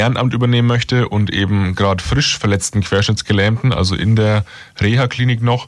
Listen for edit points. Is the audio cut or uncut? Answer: uncut